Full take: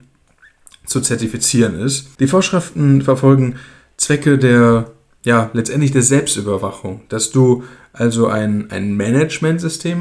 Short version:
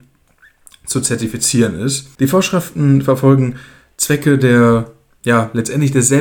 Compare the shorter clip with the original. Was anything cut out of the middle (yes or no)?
no